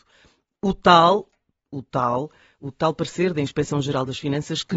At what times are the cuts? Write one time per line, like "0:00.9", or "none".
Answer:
none